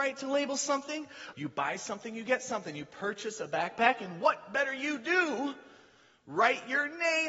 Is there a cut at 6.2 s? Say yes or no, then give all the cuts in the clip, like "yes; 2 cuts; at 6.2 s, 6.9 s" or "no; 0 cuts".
no; 1 cut; at 1.3 s